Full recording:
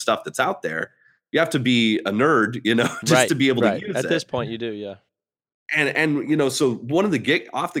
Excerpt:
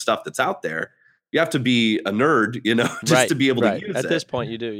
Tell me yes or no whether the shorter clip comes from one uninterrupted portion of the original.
yes